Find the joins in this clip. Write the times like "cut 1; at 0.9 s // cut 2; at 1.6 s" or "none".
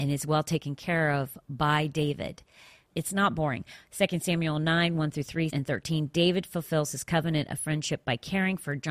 cut 1; at 2.9 s // cut 2; at 5.5 s